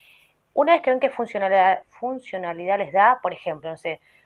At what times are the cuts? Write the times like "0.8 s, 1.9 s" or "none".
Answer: 1.8 s